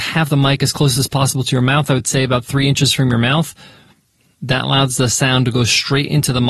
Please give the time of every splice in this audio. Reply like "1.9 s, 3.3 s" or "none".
none